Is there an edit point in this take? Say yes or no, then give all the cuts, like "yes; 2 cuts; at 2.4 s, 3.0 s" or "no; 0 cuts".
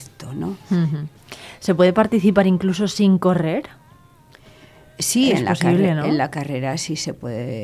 no; 0 cuts